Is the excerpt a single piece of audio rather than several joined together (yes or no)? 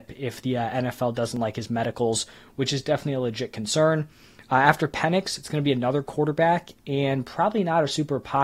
yes